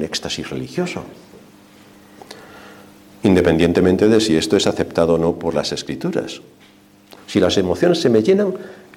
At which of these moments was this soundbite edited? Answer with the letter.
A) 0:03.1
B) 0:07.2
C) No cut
B